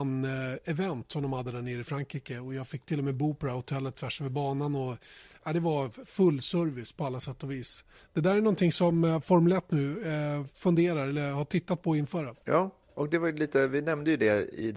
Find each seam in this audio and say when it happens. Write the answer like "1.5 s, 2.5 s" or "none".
none

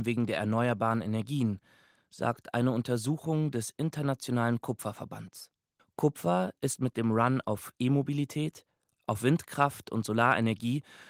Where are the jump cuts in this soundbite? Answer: 5.8 s, 8.9 s

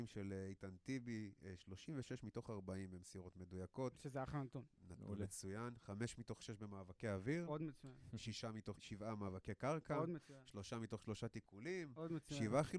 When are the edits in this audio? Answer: 8.8 s

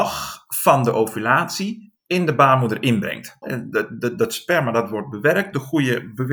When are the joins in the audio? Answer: 3.4 s

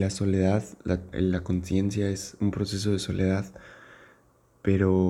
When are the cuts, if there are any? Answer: 1.1 s

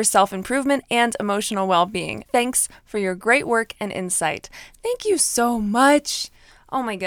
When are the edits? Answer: 2.3 s

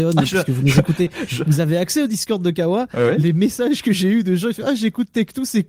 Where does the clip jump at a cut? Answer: none

